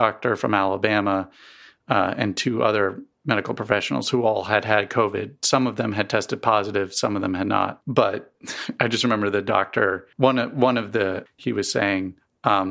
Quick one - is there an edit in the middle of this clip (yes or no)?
yes